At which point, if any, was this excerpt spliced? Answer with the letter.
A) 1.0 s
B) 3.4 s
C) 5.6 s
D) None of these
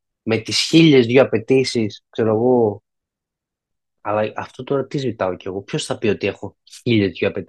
D